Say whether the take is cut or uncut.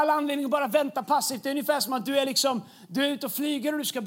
uncut